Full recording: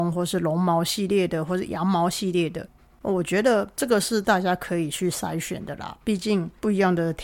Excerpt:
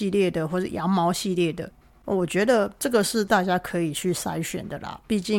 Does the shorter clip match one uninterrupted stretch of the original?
yes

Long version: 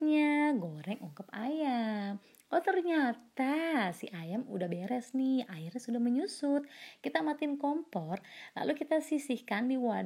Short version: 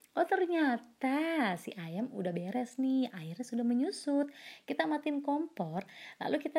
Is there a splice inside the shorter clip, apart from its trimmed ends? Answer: no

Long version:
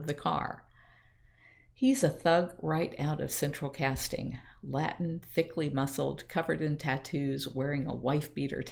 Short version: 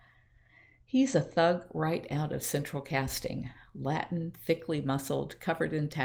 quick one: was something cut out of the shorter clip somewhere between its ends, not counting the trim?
no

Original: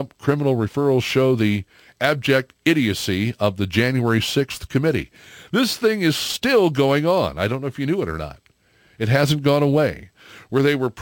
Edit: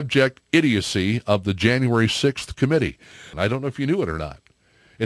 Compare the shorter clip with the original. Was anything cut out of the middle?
yes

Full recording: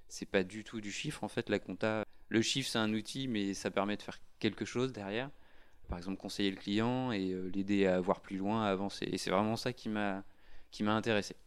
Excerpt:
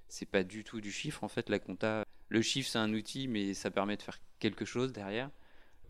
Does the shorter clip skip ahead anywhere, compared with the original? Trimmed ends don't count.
no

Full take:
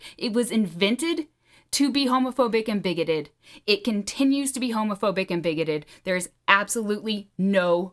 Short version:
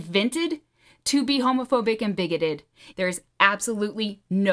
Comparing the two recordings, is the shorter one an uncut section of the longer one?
no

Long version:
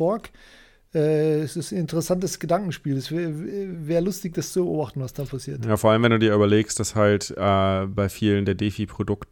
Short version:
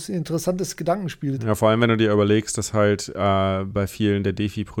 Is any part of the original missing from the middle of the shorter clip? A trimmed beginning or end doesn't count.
yes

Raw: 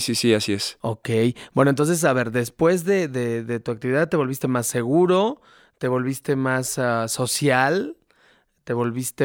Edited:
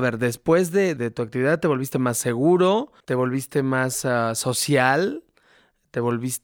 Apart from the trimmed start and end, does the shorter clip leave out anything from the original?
yes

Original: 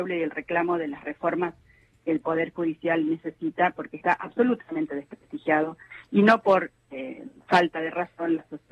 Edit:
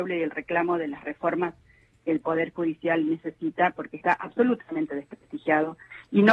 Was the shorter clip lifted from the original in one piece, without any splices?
yes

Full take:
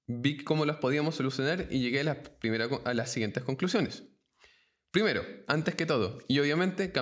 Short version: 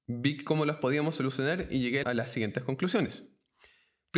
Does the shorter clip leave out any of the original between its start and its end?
yes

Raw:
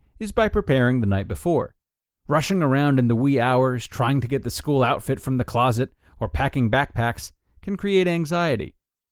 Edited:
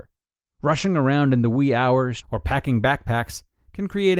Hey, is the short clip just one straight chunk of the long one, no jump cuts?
no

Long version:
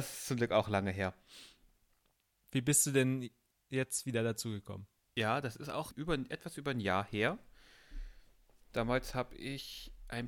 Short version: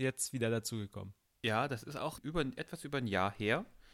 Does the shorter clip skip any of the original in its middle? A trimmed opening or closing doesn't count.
no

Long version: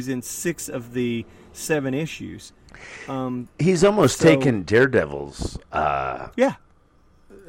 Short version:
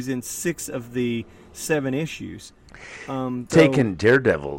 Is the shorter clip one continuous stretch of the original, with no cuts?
no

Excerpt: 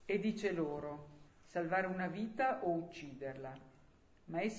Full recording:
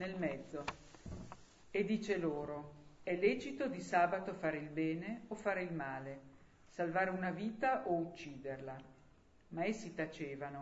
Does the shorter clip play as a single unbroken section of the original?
no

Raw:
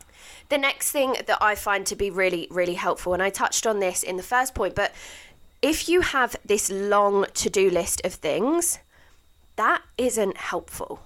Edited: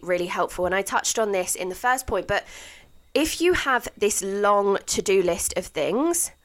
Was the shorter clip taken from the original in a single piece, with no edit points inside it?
yes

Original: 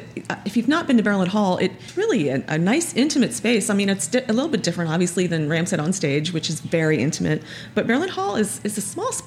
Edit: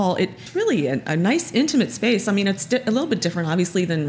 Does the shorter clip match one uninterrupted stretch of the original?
yes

